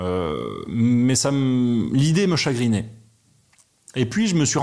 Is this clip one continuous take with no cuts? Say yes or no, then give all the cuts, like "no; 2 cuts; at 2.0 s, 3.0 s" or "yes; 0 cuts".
yes; 0 cuts